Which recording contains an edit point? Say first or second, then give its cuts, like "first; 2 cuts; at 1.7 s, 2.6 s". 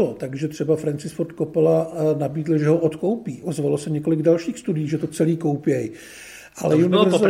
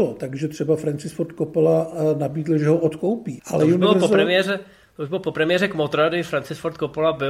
second; 1 cut; at 3.4 s